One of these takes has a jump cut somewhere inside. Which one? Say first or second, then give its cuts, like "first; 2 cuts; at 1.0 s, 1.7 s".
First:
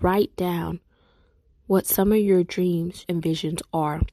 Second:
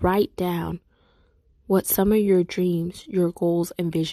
first; 1 cut; at 3.0 s